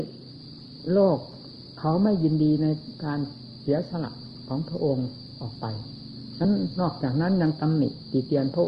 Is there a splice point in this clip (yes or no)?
no